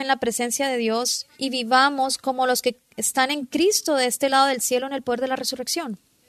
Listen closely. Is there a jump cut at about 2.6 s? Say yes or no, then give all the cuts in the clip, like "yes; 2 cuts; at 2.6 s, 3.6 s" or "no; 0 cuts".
no; 1 cut; at 1.3 s